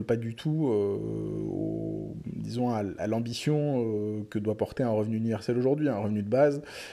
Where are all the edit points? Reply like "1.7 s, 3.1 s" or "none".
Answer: none